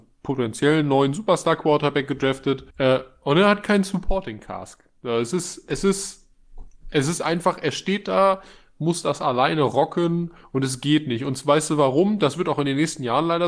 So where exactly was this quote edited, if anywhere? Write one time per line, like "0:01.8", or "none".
0:02.7

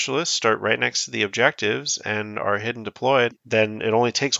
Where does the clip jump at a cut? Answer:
0:03.3

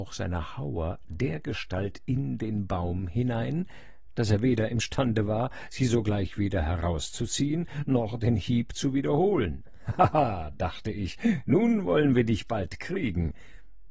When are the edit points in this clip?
none

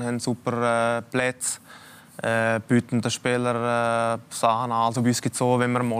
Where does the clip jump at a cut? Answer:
none

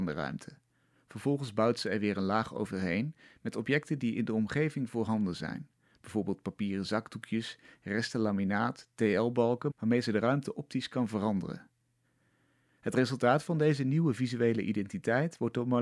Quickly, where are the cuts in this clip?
0:09.7

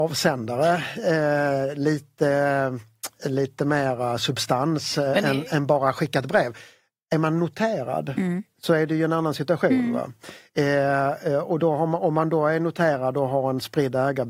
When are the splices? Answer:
none

